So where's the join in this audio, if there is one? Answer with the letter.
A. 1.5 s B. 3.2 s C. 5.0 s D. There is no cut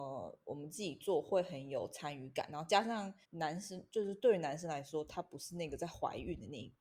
B